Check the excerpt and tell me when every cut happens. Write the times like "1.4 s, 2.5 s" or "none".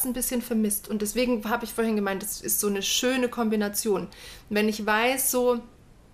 none